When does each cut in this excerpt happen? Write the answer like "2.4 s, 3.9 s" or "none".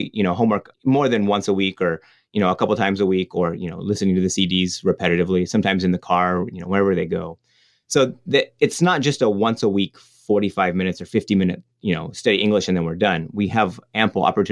none